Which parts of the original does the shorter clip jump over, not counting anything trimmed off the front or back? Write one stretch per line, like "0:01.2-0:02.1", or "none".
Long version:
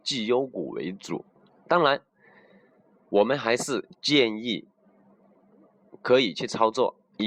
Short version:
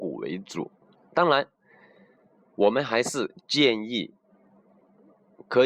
none

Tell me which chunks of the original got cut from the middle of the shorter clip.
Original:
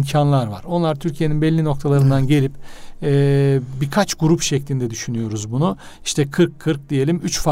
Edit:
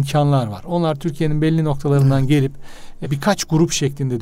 0:03.0-0:03.7

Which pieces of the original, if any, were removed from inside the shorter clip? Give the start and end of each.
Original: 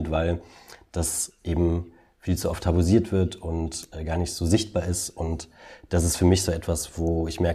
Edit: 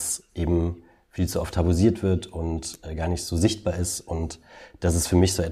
none

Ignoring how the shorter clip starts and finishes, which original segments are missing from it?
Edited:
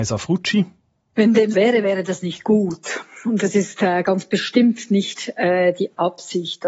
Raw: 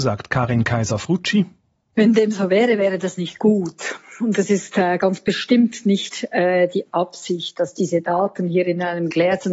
0:02.3-0:02.5

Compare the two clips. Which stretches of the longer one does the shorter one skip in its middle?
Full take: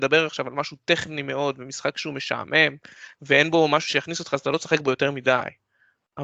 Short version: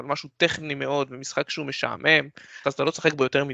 0:03.1-0:04.3

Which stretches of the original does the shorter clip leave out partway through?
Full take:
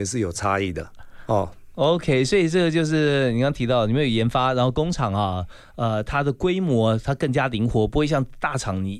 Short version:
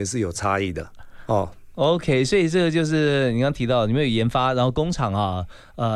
none

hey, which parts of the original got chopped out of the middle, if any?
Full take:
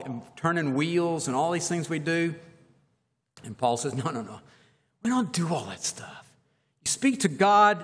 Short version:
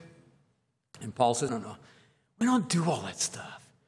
0:03.9-0:04.1

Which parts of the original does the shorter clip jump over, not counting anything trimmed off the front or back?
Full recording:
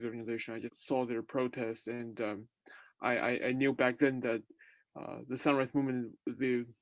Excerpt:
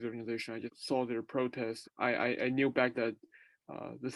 0:01.8-0:02.9
0:04.0-0:04.2

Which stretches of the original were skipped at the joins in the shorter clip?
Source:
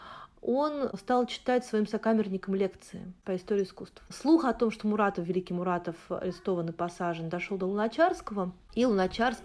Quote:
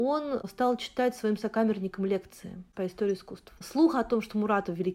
none

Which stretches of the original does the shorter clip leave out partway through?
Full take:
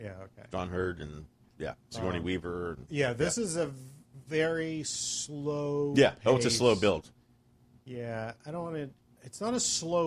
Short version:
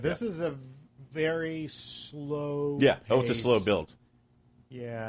none

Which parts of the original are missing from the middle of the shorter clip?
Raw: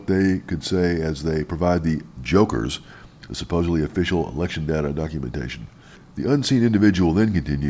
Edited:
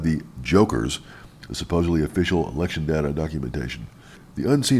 none

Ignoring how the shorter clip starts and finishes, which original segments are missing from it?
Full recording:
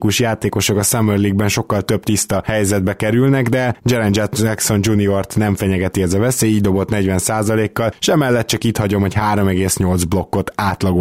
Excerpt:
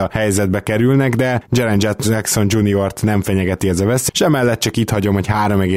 0:06.4-0:08.0

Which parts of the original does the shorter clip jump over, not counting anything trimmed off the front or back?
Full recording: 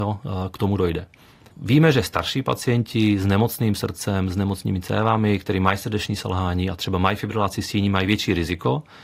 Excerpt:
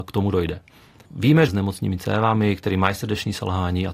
0:01.9-0:04.3

